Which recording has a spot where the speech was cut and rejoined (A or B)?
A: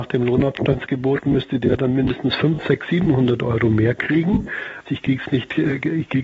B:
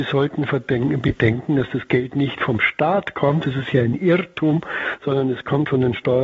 A